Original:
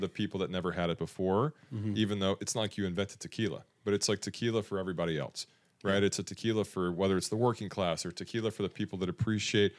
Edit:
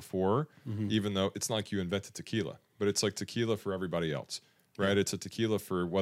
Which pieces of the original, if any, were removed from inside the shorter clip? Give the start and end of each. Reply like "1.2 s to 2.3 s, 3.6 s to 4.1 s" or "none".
none